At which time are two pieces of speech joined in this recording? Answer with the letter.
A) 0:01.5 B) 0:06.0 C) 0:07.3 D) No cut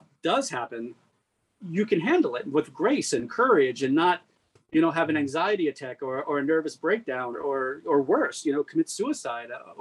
C